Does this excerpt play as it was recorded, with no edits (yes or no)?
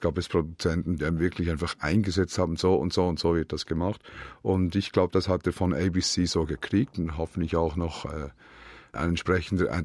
no